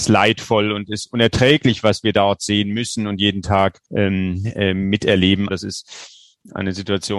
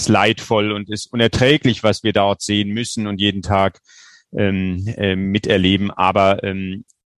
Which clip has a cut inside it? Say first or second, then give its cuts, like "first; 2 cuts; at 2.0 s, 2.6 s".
first; 2 cuts; at 3.9 s, 5.5 s